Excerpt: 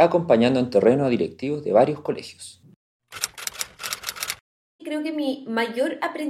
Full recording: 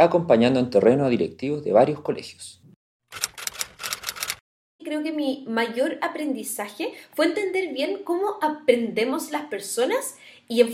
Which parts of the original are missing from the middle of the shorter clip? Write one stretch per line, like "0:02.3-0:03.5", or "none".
none